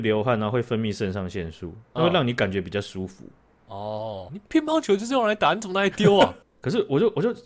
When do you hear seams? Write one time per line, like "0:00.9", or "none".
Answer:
0:04.3
0:06.4

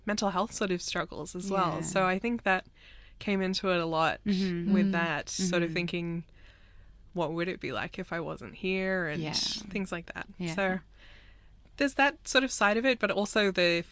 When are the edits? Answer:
none

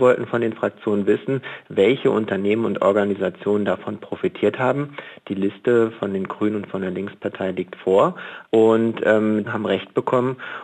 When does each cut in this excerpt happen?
0:05.2
0:08.4
0:09.4

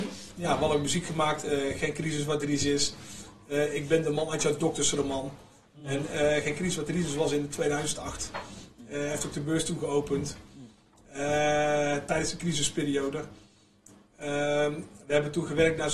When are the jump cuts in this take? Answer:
none

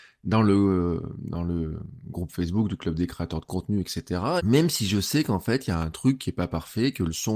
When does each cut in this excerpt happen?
0:04.4

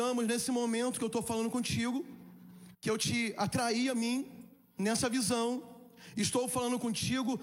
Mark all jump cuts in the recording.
0:02.7

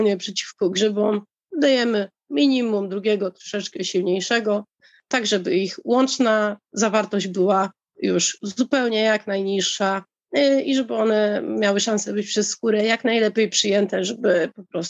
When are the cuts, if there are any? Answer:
none

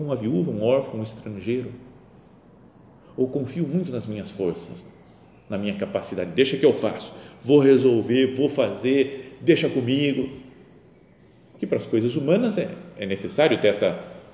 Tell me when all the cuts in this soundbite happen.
none

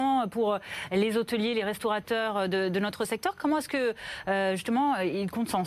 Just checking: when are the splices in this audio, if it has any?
none

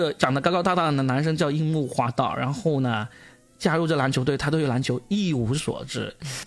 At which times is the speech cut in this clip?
none

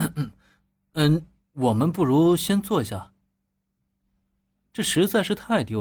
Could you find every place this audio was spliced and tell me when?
0:01.4
0:04.6

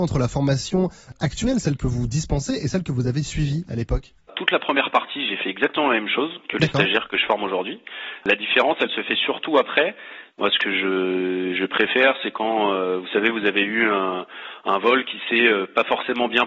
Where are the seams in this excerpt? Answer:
0:08.2
0:10.3

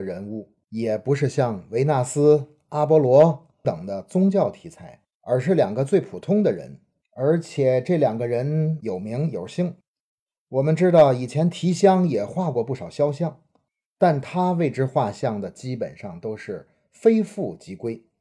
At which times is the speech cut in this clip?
0:03.6

